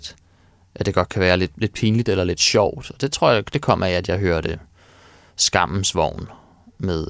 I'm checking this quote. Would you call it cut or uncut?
uncut